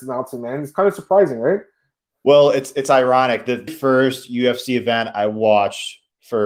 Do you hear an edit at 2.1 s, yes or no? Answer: no